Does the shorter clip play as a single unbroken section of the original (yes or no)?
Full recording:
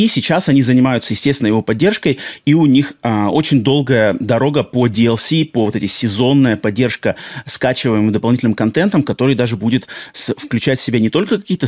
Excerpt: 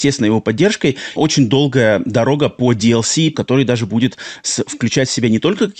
no